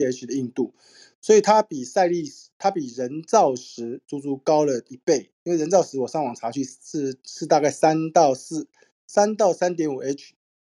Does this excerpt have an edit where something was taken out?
no; 0 cuts

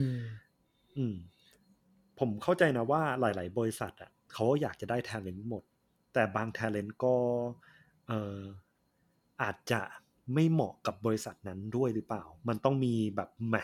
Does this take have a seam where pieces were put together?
no; 0 cuts

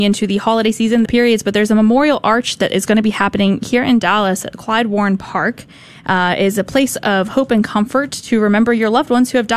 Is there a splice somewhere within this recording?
yes; 1 cut; at 1.1 s

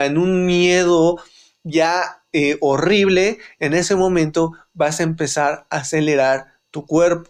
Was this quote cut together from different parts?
no; 0 cuts

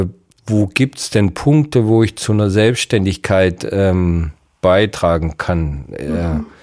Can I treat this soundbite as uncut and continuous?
yes; 0 cuts

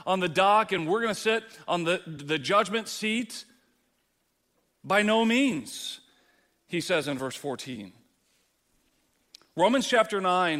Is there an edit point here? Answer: no; 0 cuts

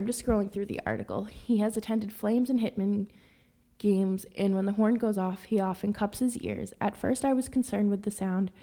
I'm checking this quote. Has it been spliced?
no; 0 cuts

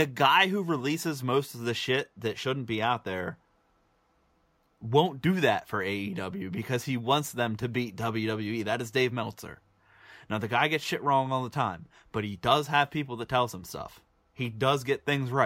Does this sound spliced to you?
no; 0 cuts

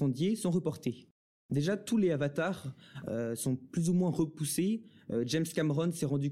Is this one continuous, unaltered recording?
yes; 0 cuts

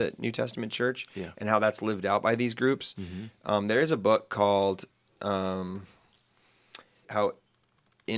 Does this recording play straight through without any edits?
no; 1 cut; at 7.0 s

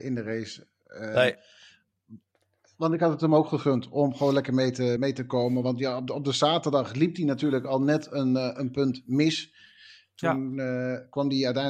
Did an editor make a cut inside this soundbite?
yes; 1 cut; at 5.0 s

